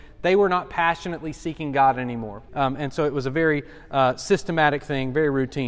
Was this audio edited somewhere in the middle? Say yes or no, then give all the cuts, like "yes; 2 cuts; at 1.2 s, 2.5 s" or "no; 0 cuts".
yes; 1 cut; at 2.5 s